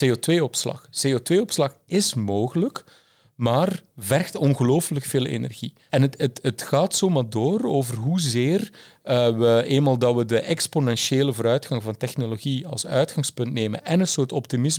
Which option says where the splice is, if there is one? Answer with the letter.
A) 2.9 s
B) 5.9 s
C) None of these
B